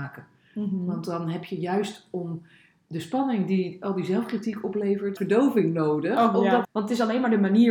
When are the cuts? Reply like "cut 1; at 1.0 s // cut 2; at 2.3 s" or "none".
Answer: cut 1; at 5.2 s // cut 2; at 6.6 s